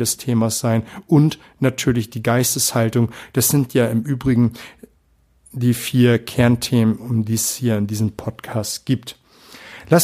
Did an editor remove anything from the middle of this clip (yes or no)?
no